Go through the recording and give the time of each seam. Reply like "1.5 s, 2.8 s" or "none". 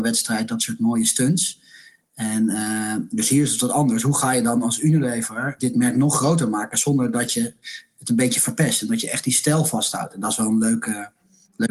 5.6 s